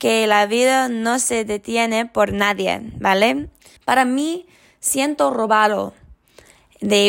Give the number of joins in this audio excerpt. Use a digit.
1